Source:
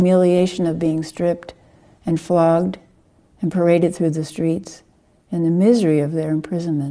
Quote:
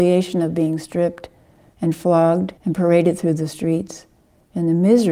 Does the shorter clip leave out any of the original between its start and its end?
yes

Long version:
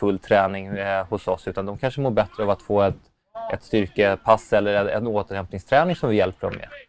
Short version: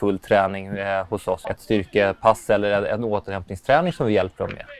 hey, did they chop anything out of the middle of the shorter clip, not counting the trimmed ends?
yes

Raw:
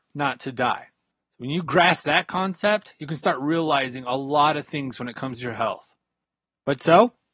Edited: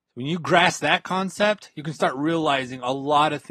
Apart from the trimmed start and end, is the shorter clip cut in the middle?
no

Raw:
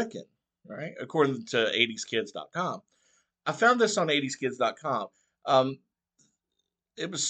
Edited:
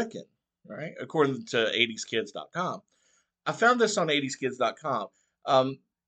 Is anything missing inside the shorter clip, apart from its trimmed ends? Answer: no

